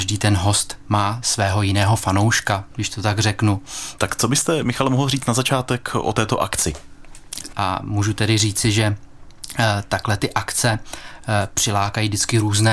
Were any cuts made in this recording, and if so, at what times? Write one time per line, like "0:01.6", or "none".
0:04.0
0:07.5